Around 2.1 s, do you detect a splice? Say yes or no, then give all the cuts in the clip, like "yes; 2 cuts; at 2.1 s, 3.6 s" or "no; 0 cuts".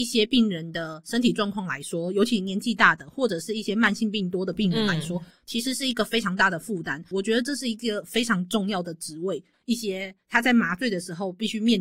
no; 2 cuts; at 7.1 s, 9.5 s